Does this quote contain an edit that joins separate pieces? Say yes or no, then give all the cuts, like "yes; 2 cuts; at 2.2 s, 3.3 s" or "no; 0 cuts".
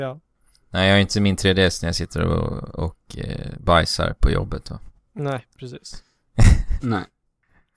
no; 0 cuts